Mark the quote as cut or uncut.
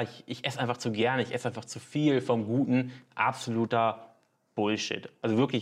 uncut